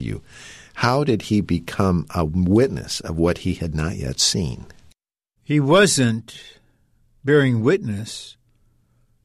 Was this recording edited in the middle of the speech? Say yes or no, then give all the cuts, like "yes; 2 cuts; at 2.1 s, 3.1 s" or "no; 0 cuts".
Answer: yes; 1 cut; at 5.4 s